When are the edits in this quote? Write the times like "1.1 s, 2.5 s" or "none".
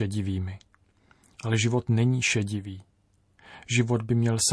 none